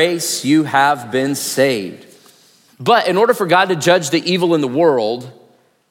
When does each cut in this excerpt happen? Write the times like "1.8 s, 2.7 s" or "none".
2.7 s